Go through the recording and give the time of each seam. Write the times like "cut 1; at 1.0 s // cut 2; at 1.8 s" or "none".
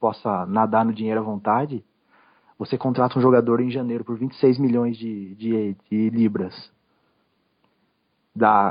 none